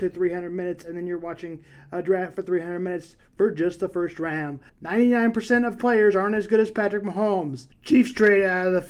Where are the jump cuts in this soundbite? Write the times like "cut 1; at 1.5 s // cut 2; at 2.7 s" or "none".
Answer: cut 1; at 4.7 s // cut 2; at 7.7 s